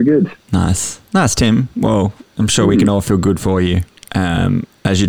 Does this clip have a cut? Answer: no; 0 cuts

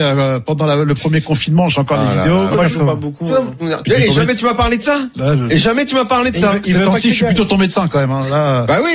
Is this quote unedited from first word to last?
no; 2 cuts; at 2.5 s, 3.8 s

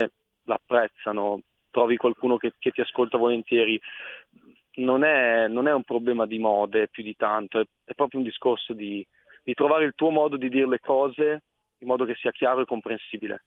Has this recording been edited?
no; 0 cuts

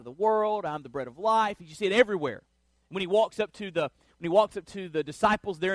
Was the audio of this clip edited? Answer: no; 0 cuts

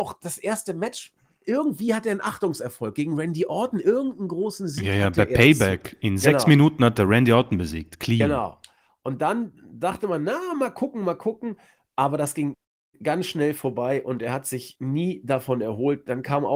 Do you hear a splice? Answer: no; 0 cuts

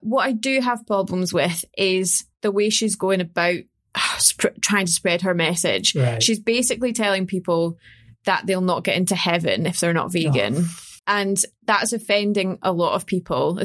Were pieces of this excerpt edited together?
yes; 2 cuts; at 2.3 s, 11.0 s

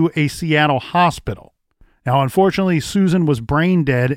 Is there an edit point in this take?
no; 0 cuts

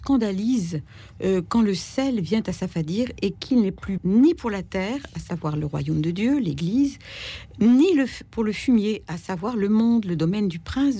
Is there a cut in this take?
yes; 1 cut; at 4.0 s

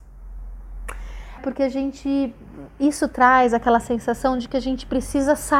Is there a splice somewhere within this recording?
yes; 1 cut; at 1.4 s

